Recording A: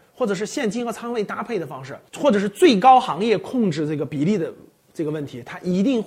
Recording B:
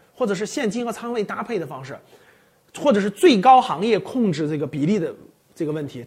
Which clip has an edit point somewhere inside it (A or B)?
A